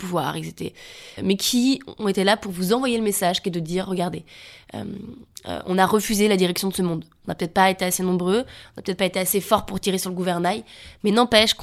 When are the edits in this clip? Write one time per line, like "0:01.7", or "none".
0:01.2